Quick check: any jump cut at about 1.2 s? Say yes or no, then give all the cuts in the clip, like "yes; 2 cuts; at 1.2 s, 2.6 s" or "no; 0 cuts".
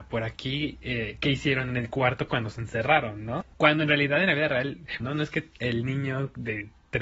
no; 2 cuts; at 3.5 s, 5.0 s